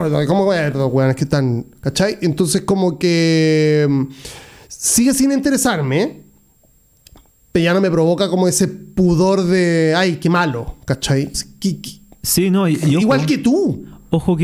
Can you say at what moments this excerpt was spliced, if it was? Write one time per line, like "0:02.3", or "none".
0:11.3